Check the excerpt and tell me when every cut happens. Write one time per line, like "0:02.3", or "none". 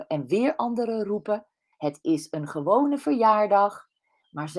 0:01.7